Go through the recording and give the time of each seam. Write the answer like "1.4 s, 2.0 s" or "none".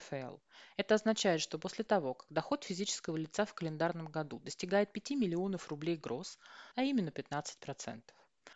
6.7 s

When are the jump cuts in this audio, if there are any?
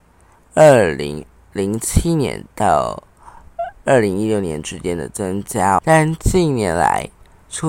5.8 s

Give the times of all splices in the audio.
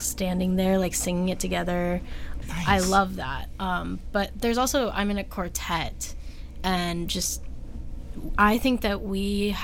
2.4 s

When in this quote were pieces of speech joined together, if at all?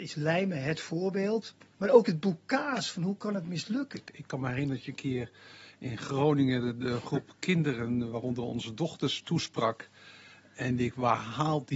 1.7 s, 3.9 s

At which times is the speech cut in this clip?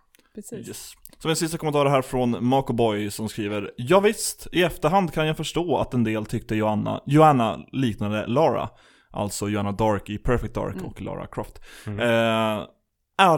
none

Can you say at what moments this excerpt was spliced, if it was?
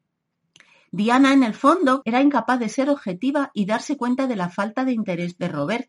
2.0 s

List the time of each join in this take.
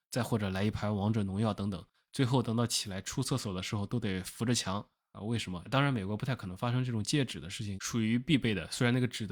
5.6 s, 7.8 s

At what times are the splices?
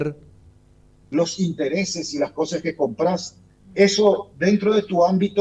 1.0 s, 3.6 s

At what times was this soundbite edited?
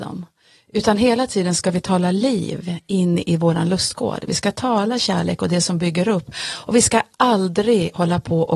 none

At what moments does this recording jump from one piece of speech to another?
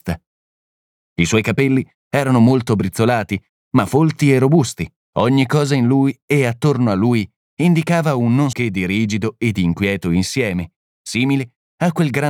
5.1 s, 8.5 s

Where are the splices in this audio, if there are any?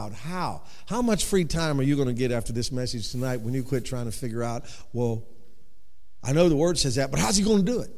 none

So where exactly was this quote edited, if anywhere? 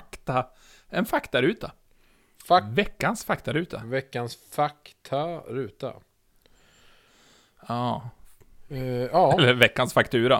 none

